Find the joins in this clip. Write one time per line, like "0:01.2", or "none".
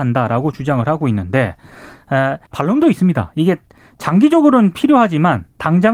0:02.5